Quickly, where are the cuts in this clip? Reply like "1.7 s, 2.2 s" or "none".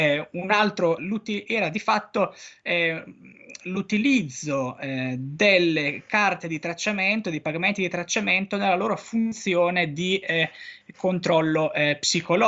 1.0 s